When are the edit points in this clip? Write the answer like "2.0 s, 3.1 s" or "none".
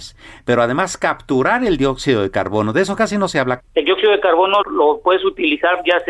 3.6 s, 4.6 s